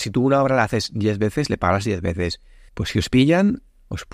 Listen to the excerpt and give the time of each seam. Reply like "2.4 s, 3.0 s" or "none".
2.7 s